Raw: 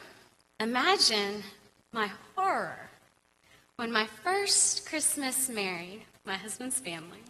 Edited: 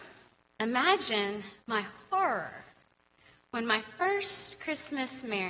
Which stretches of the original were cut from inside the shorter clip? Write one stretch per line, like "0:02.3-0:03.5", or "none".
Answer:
0:01.6-0:01.8